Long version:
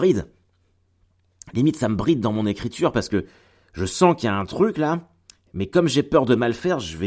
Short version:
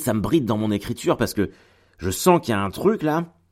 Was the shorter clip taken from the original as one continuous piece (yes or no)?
yes